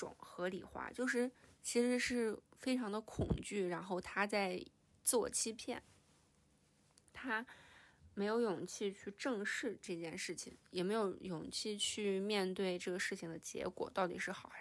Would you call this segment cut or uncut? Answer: uncut